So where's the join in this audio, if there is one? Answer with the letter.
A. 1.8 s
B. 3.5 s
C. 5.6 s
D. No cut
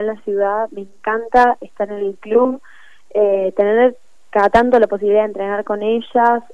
D